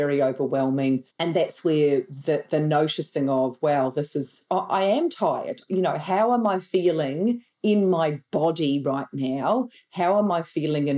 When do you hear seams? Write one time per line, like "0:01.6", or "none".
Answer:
0:01.1